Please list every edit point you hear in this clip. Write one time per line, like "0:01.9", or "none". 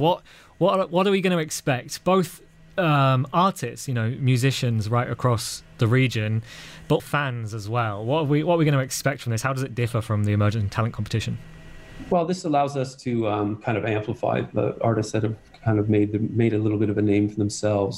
0:07.0